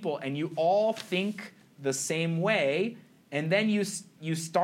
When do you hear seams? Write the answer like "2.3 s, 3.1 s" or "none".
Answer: none

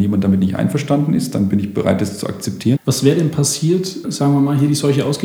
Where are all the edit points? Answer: 2.8 s, 4.0 s

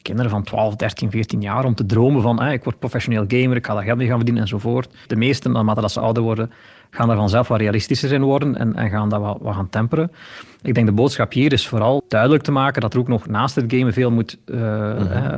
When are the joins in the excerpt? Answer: 5.1 s, 12.0 s

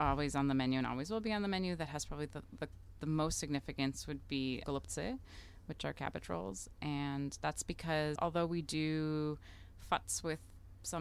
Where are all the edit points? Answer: 4.6 s, 8.2 s

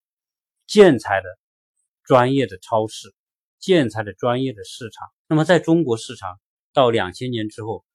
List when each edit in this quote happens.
5.2 s

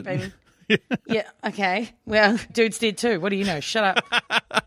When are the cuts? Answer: 2.5 s

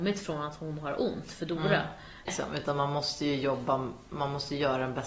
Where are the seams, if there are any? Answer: 2.3 s

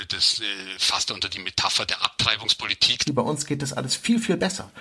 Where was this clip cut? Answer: 3.1 s

